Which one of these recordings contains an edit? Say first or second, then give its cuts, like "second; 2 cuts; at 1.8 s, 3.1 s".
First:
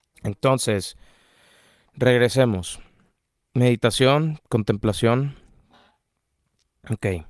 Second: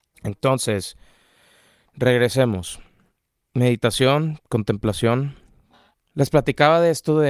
second; 1 cut; at 5.9 s